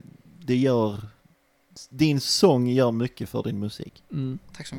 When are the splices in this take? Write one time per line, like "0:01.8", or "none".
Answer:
none